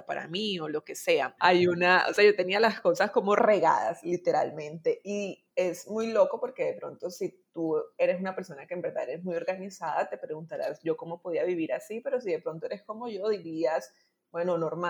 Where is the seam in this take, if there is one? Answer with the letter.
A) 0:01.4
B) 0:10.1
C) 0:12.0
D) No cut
A